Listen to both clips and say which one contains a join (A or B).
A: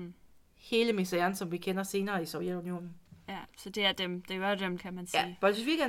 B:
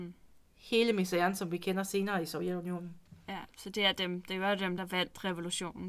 A